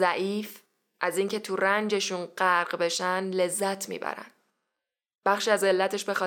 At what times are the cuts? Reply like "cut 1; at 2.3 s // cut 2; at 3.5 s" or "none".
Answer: none